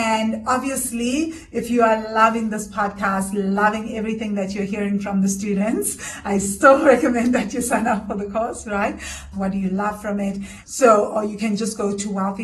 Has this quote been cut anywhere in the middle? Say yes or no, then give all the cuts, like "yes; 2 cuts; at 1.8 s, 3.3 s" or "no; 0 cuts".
yes; 2 cuts; at 9.3 s, 10.6 s